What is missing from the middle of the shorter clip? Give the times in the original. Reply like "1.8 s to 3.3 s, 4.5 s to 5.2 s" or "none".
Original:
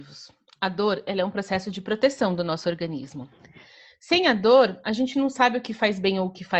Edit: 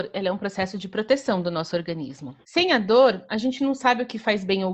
3.3 s to 4.0 s